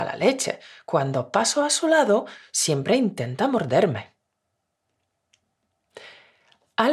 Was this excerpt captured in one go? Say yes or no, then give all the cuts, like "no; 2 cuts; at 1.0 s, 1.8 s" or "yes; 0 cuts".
yes; 0 cuts